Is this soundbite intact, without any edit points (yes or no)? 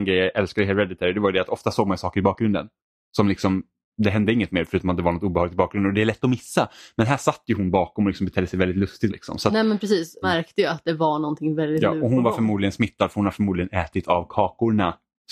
no